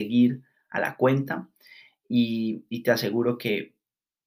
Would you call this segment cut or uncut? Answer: uncut